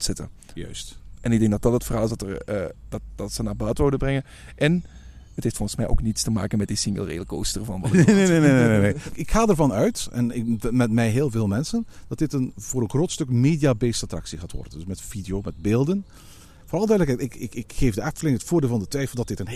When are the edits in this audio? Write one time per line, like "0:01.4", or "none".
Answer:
none